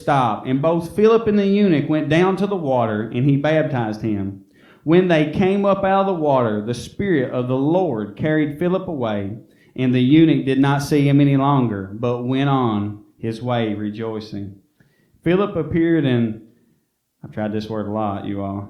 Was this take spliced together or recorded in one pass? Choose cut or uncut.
uncut